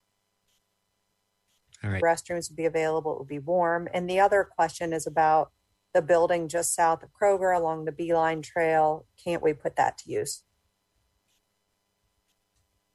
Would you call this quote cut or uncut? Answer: cut